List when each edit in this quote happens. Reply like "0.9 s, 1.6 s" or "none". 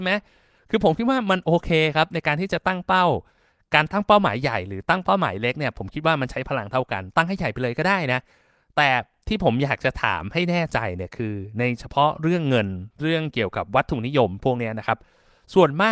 none